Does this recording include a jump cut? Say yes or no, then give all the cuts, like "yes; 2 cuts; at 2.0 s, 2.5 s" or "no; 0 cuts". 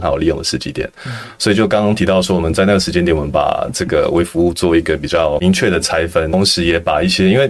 no; 0 cuts